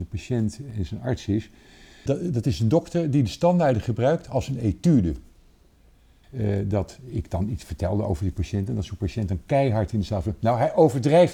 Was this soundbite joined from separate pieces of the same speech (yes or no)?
yes